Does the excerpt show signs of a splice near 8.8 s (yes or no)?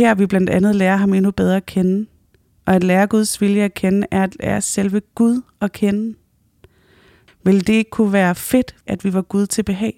yes